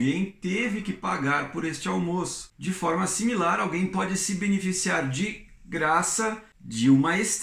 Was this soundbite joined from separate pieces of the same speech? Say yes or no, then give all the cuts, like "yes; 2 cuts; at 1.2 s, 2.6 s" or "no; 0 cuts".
no; 0 cuts